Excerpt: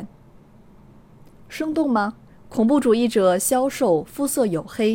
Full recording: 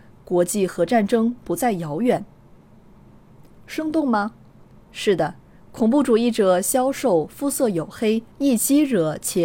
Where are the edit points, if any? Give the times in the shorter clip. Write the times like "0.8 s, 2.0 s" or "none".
2.3 s